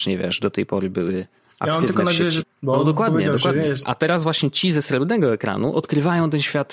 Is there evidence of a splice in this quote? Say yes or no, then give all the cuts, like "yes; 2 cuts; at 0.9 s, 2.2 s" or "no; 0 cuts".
yes; 2 cuts; at 2.4 s, 3.8 s